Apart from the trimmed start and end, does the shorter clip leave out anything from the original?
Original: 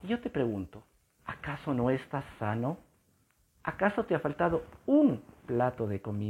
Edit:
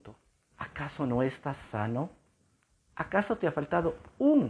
no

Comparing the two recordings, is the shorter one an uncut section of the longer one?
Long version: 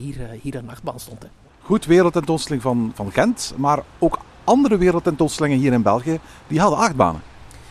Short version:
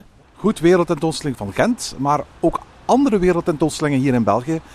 no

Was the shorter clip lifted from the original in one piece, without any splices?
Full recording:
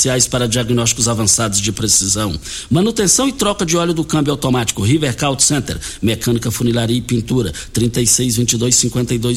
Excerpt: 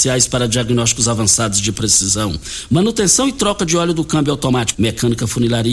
no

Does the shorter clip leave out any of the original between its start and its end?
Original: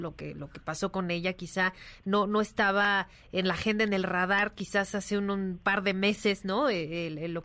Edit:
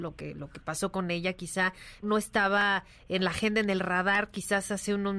yes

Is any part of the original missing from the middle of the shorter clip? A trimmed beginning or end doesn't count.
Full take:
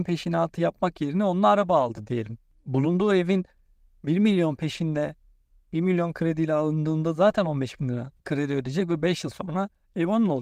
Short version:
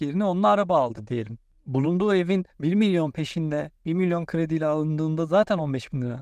yes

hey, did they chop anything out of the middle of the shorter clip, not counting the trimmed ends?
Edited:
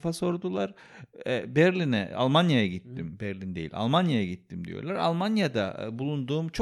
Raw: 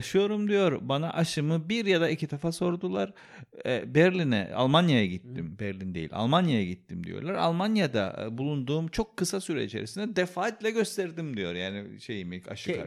no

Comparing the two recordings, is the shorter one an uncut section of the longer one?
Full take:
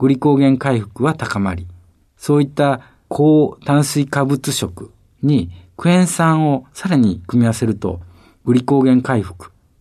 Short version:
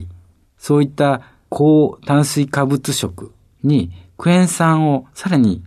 yes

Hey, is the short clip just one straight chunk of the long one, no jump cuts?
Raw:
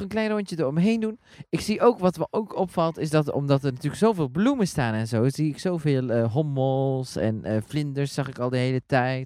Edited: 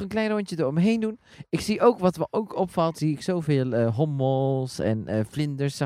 no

